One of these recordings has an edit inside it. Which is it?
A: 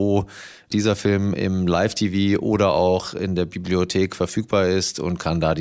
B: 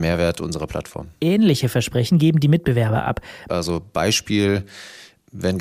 B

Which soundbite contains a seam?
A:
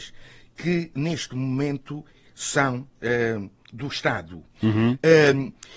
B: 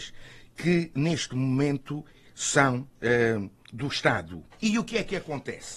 B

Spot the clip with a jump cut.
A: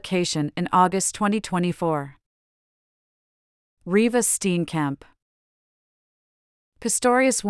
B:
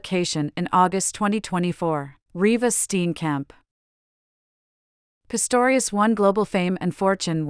B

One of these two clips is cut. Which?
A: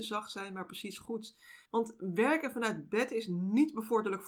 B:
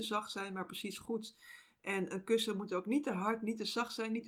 A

